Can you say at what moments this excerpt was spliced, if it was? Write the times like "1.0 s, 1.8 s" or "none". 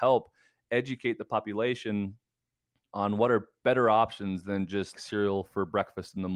4.9 s